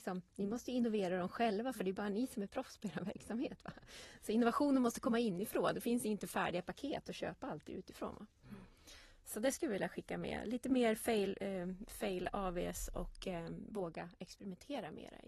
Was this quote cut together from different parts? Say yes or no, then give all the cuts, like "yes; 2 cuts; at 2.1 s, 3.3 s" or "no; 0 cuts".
no; 0 cuts